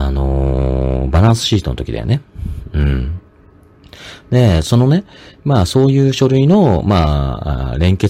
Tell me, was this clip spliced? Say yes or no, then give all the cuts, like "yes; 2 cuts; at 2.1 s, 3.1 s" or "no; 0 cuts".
no; 0 cuts